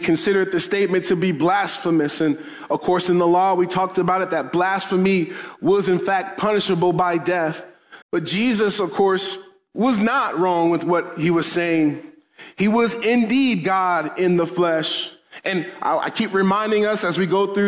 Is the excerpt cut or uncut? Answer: cut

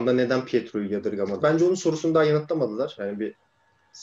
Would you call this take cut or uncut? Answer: cut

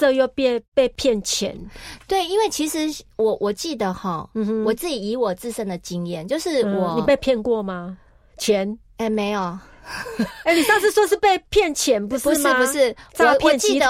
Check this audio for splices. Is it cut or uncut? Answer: uncut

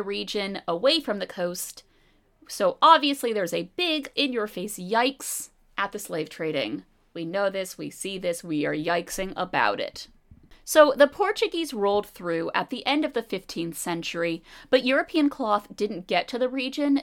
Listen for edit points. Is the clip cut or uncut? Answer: cut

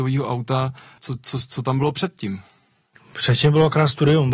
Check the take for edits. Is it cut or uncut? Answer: cut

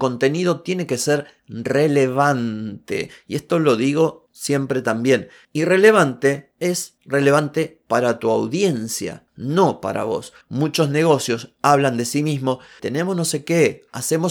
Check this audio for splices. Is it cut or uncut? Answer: cut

